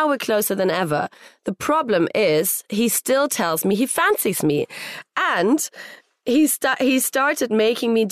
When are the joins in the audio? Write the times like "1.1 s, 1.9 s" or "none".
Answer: none